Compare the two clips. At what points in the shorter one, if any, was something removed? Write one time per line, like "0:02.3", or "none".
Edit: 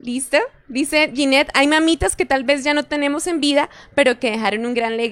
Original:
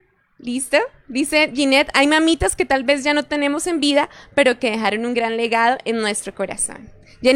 none